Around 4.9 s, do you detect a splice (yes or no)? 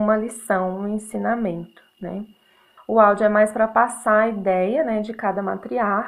no